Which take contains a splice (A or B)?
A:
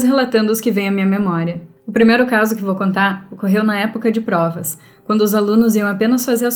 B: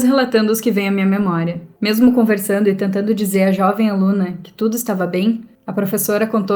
B